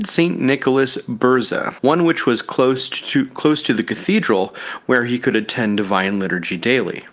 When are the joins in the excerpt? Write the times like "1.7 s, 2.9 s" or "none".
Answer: 1.8 s